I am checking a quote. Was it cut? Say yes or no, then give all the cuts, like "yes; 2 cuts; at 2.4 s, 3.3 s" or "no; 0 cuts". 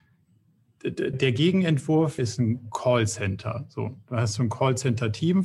yes; 2 cuts; at 1.1 s, 2.2 s